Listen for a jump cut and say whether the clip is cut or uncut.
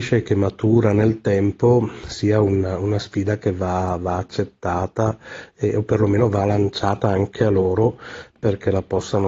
uncut